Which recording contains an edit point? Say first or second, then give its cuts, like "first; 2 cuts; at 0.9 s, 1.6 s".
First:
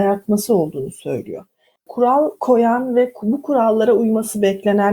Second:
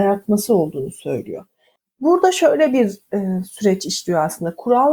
first; 1 cut; at 1.9 s